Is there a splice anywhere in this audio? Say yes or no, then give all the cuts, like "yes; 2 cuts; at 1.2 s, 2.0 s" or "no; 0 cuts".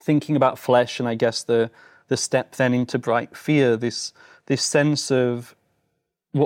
no; 0 cuts